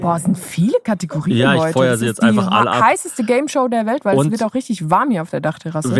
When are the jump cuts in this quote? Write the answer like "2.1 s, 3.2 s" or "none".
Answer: none